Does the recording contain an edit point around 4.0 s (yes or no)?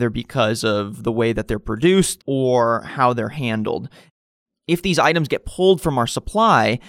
no